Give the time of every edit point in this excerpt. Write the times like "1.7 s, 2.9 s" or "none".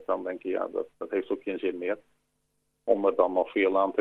0.9 s